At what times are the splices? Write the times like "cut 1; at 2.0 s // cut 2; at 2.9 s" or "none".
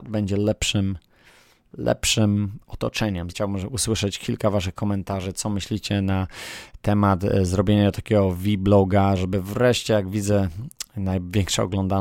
cut 1; at 3.3 s